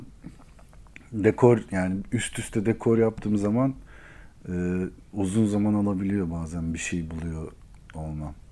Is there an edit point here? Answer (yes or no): no